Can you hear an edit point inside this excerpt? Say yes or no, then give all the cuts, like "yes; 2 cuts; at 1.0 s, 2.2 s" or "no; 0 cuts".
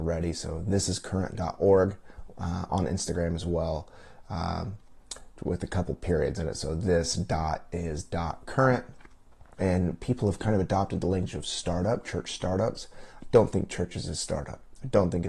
yes; 1 cut; at 9.5 s